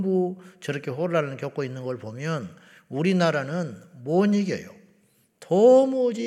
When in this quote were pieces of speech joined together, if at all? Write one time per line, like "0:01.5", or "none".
none